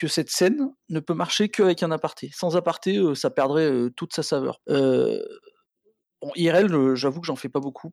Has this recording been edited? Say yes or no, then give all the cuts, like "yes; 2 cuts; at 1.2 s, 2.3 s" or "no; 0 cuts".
yes; 1 cut; at 4.6 s